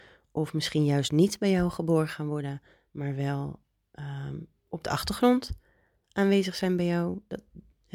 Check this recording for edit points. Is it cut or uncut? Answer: uncut